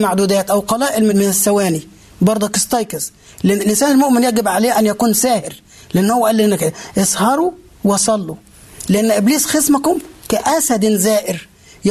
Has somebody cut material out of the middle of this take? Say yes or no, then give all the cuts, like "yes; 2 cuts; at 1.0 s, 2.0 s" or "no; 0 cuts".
yes; 1 cut; at 1.1 s